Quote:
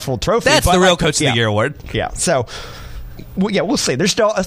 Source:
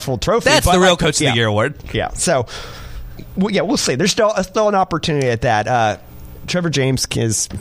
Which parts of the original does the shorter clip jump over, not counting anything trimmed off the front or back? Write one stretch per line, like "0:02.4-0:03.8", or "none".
none